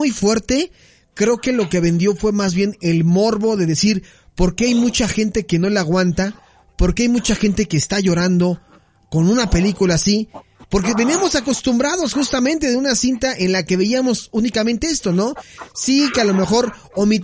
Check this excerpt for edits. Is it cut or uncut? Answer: uncut